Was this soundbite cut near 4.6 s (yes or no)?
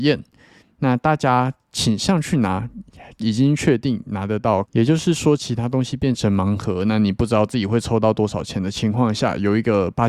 yes